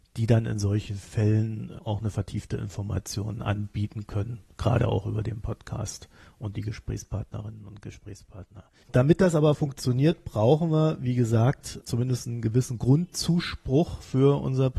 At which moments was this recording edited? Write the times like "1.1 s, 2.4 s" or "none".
8.8 s

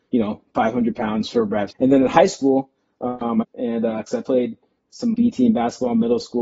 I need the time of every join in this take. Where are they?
1.7 s, 3.4 s, 5.1 s

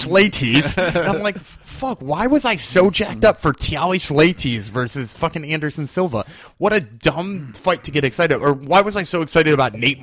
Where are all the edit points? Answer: none

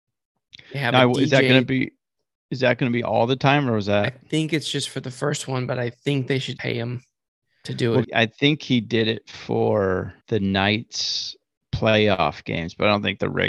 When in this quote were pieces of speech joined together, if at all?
6.6 s, 8.0 s, 10.2 s

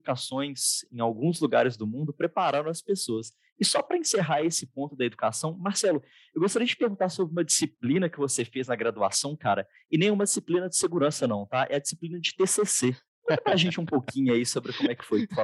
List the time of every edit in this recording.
none

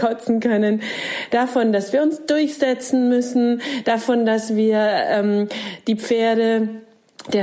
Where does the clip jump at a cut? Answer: none

